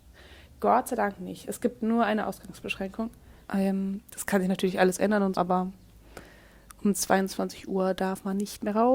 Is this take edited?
yes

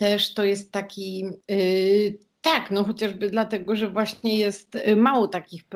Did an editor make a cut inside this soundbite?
yes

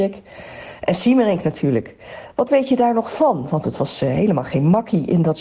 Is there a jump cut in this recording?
no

